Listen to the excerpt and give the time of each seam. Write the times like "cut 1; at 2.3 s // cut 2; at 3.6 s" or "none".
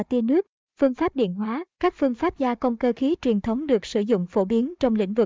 cut 1; at 1.8 s